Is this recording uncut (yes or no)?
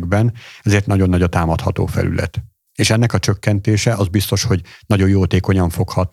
yes